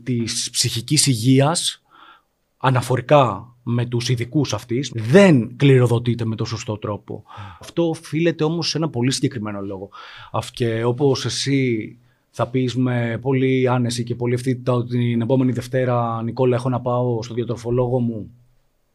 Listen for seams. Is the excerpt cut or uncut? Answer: cut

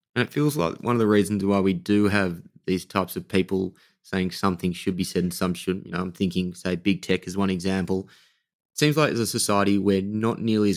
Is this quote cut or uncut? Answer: uncut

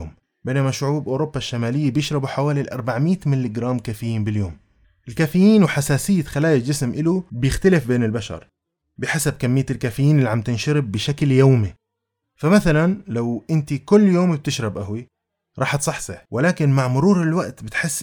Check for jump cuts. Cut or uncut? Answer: uncut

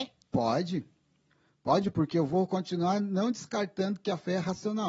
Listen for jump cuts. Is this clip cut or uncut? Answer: uncut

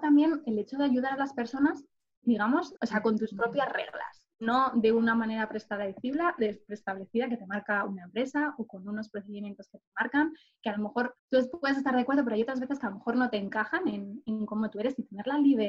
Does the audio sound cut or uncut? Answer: cut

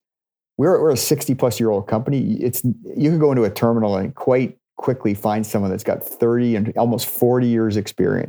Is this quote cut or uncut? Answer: uncut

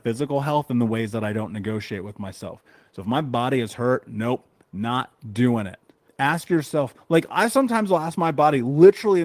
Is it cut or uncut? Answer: cut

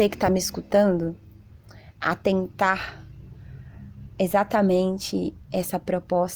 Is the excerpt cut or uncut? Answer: uncut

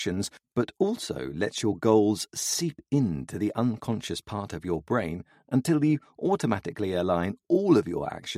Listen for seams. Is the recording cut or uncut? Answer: uncut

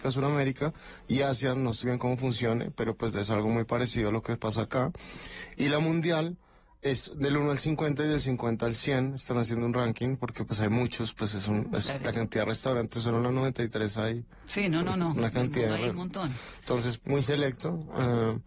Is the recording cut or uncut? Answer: cut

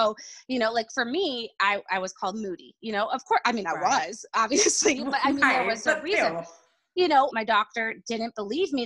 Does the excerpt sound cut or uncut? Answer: cut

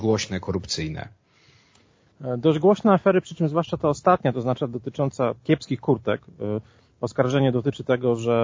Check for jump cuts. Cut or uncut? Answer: uncut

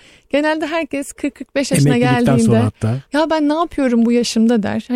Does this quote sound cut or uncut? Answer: cut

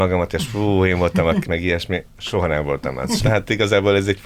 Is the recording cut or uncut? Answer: cut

